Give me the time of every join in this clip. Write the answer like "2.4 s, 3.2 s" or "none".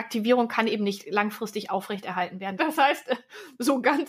2.6 s

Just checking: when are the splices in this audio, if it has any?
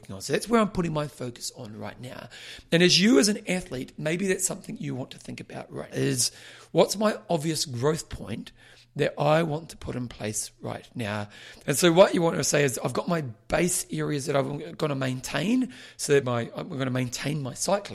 5.9 s, 11.6 s, 16.2 s

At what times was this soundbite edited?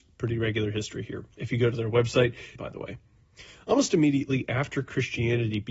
1.4 s, 2.6 s

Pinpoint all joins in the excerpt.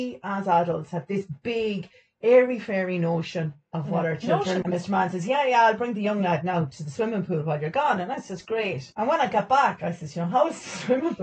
4.6 s

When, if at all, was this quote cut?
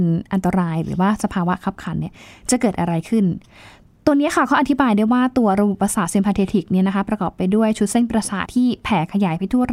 8.5 s

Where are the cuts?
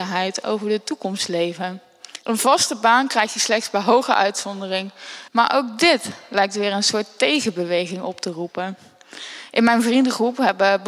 2.2 s, 5.3 s

